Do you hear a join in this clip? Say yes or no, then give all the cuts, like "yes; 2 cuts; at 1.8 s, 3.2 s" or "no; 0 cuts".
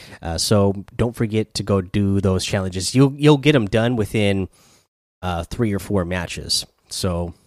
no; 0 cuts